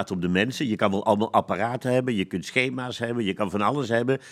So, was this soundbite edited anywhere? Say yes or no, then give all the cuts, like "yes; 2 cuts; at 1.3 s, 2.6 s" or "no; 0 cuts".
no; 0 cuts